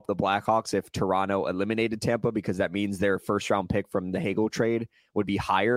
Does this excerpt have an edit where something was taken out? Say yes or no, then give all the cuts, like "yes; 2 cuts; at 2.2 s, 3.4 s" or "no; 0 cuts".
no; 0 cuts